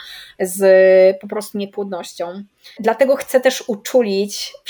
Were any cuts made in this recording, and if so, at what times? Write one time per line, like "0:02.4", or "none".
0:02.8